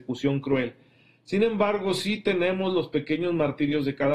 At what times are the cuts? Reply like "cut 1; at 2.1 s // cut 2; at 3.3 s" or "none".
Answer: none